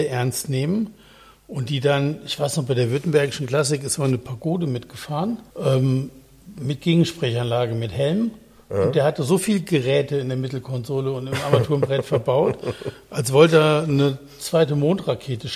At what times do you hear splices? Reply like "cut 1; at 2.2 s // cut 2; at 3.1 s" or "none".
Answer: cut 1; at 5.5 s